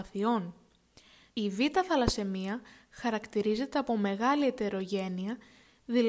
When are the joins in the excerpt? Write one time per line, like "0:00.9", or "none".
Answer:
0:01.3